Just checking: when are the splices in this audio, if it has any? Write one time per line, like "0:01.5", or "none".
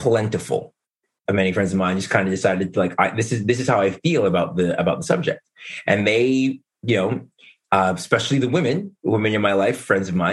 0:01.3